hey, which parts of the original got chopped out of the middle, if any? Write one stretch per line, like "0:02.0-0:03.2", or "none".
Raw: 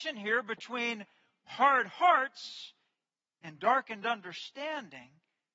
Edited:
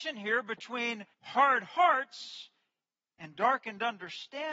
0:01.1-0:01.4